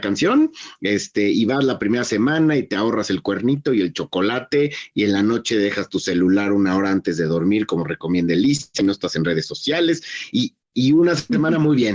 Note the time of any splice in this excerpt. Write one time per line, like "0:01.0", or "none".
none